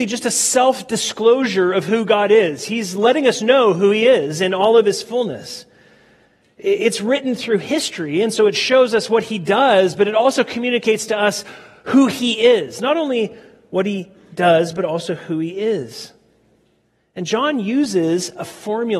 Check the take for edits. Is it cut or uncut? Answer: uncut